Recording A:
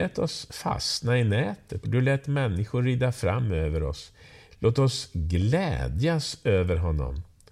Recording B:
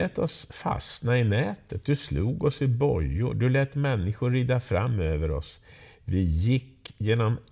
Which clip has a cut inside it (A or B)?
A